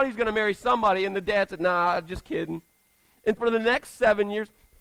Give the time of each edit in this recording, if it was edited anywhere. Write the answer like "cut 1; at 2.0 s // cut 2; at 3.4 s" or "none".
cut 1; at 3.4 s